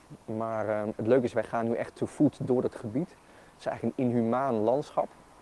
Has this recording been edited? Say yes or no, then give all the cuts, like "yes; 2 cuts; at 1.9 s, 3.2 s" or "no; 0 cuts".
no; 0 cuts